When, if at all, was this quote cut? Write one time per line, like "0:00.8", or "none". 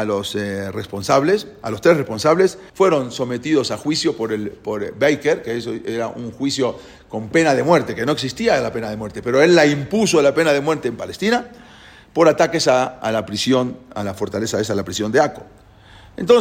0:02.7